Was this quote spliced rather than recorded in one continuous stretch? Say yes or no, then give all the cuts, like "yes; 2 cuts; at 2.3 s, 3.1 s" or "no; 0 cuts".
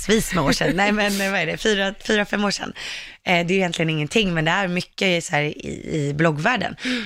no; 0 cuts